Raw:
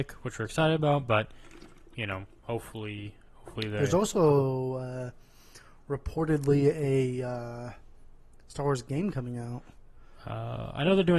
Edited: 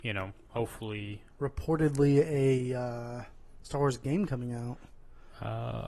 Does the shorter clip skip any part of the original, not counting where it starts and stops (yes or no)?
yes